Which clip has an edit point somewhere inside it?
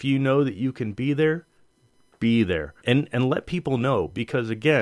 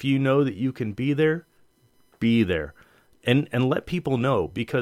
first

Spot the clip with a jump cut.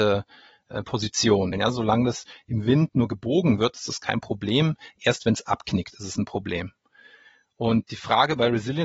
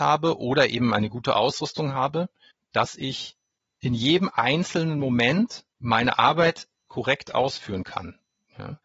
first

